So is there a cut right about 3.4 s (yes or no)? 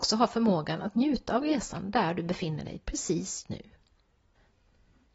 yes